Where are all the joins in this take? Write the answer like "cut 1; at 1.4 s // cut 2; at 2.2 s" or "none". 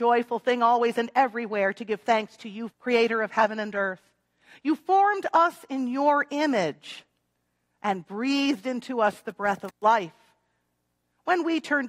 cut 1; at 2.7 s